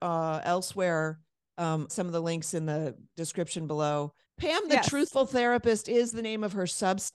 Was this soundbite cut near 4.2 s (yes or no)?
yes